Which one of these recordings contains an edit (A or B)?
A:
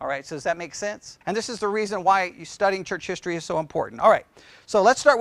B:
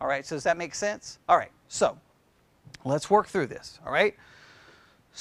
A